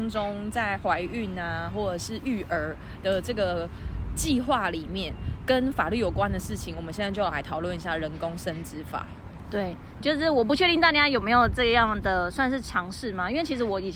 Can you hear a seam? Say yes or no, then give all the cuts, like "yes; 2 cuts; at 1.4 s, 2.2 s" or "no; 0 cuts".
yes; 1 cut; at 10.0 s